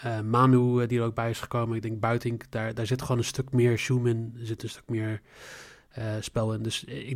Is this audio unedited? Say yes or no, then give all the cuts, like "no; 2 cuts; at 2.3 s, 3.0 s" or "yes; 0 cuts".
yes; 0 cuts